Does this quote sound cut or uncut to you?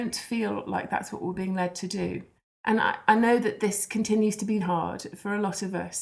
cut